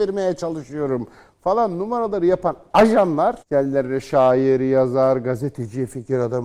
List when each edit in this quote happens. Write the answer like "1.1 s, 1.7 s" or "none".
3.4 s

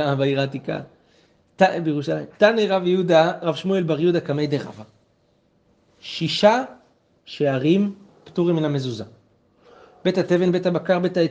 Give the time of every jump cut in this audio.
none

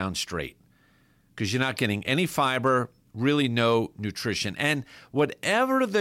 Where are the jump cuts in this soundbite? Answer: none

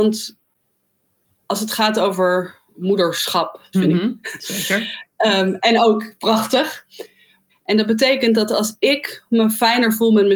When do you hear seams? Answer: 3.7 s, 7.5 s

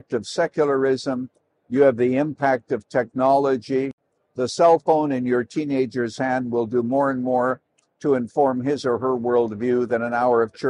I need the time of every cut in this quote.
none

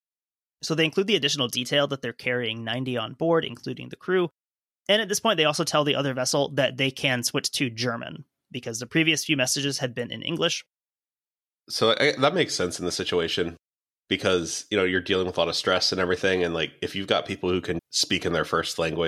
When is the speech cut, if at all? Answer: 17.8 s

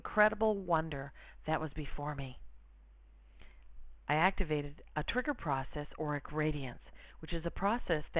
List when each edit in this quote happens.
none

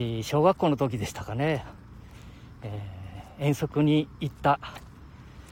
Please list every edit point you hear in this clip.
none

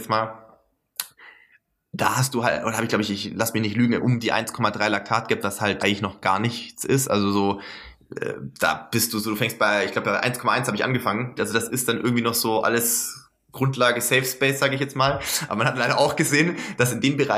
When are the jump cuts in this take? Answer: 5.8 s, 11.4 s

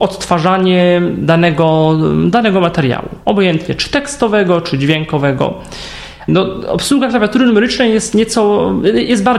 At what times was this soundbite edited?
6.3 s

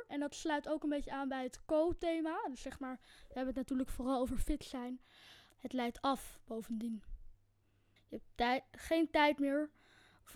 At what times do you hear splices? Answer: 5.5 s, 8.0 s

